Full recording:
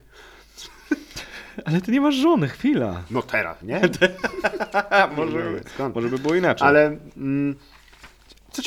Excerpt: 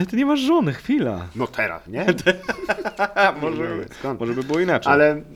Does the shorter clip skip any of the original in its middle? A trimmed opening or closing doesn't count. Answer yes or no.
no